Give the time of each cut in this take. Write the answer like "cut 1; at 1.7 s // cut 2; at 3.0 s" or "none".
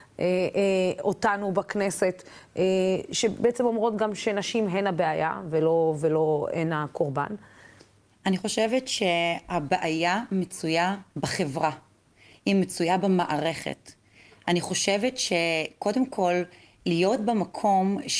cut 1; at 8.1 s // cut 2; at 11.1 s